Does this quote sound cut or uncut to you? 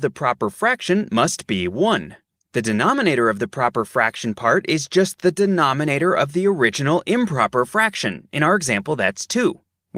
uncut